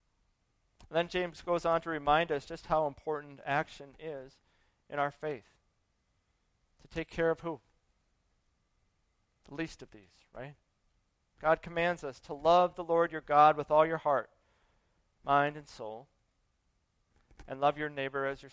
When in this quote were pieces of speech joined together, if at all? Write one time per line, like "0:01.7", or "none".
none